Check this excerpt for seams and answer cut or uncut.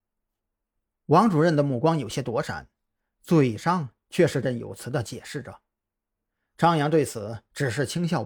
cut